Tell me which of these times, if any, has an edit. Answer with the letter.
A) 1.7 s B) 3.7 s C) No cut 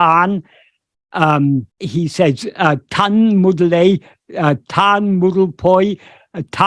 A